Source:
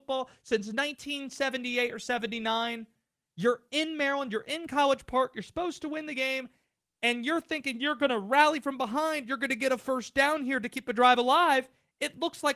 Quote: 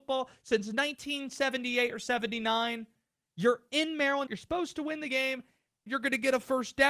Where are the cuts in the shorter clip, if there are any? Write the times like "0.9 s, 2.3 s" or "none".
4.3 s, 5.9 s